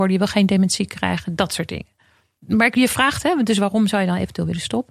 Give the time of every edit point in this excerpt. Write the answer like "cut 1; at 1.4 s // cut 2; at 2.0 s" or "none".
cut 1; at 2.4 s